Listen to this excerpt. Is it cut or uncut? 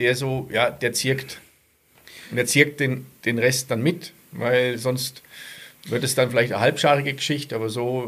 uncut